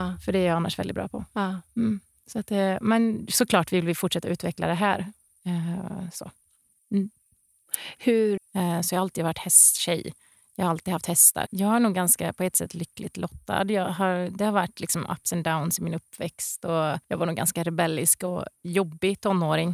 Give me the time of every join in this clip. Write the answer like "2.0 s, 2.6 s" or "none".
8.4 s, 11.5 s, 17.0 s